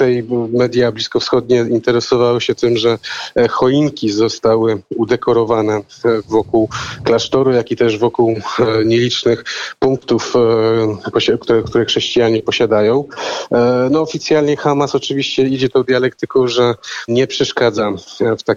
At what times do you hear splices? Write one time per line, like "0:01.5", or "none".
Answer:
0:17.1